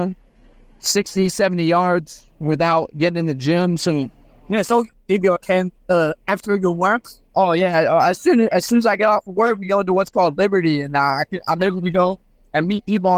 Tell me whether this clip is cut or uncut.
uncut